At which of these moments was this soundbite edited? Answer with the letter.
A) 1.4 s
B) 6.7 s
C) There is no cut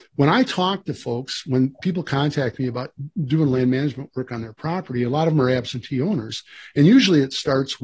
C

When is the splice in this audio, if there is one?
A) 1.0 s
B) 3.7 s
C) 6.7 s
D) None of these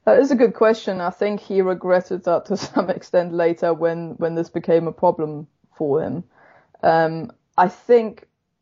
D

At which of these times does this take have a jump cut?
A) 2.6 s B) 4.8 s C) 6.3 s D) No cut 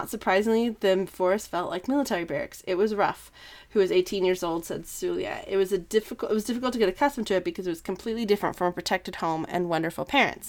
D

